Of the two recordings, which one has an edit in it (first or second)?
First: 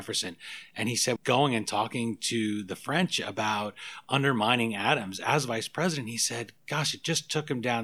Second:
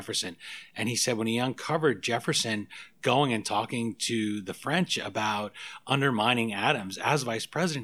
first